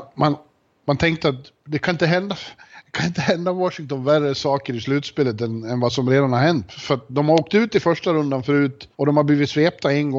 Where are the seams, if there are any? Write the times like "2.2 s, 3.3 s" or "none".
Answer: 6.7 s, 8.9 s